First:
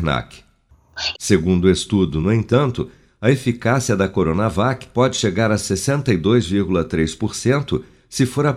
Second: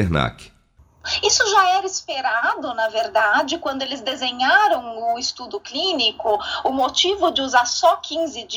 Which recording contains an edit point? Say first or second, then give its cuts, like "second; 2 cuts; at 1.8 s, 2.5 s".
first; 1 cut; at 1.1 s